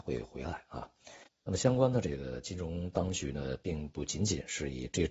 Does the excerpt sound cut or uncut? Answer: uncut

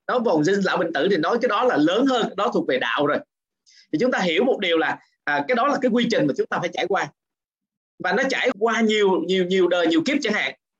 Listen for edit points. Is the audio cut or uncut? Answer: cut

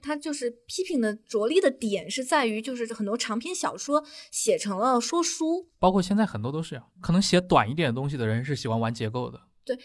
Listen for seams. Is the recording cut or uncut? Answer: uncut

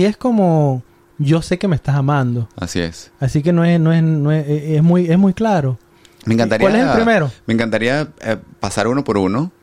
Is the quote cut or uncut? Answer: uncut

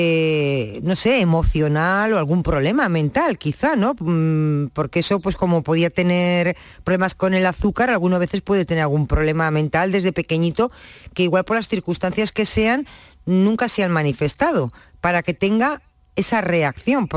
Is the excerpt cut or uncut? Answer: uncut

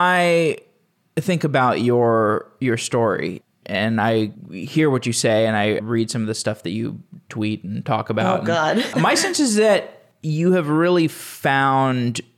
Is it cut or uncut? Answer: cut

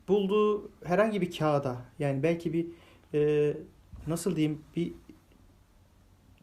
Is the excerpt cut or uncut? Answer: uncut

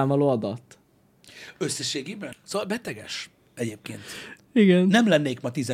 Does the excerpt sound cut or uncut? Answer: cut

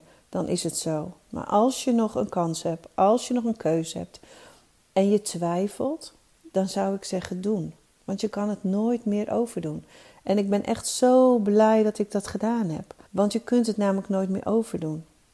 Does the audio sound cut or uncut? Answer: cut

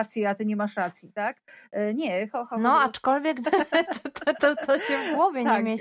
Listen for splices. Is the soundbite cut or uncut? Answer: cut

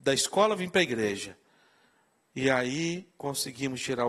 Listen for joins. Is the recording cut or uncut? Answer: uncut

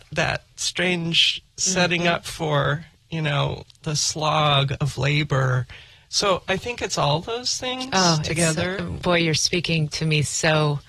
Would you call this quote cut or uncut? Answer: uncut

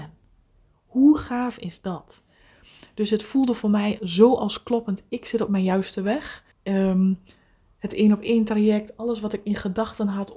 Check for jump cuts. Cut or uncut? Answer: cut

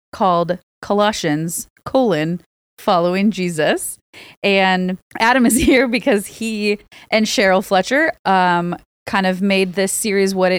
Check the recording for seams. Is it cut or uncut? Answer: cut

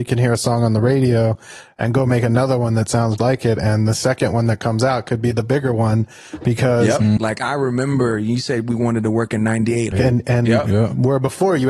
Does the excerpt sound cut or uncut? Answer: cut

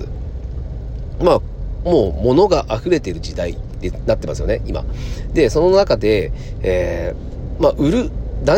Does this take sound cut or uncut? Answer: uncut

